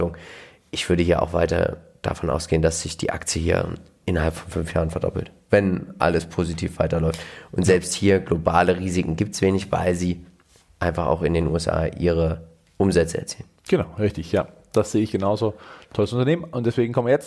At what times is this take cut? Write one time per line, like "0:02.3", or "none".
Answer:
none